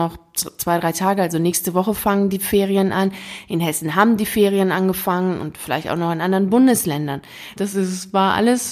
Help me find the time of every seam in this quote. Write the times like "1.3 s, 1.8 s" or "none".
7.6 s